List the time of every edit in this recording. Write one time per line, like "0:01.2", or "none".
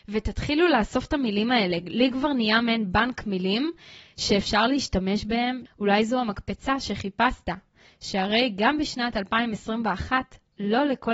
0:05.7